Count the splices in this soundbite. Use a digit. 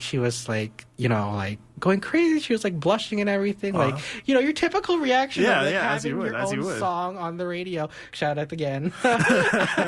1